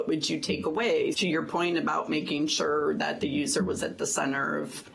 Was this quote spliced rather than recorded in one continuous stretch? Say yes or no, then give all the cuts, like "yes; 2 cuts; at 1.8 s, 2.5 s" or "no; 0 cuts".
yes; 1 cut; at 1.1 s